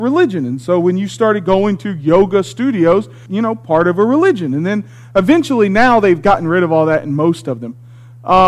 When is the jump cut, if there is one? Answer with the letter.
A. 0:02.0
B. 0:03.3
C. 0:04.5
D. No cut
B